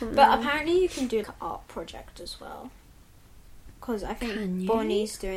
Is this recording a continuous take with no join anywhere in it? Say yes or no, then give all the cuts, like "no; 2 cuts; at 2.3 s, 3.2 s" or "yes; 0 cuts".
no; 2 cuts; at 1.2 s, 3.7 s